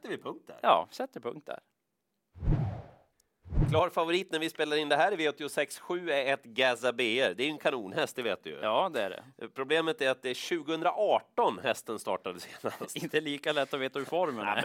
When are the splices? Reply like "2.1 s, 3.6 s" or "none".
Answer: none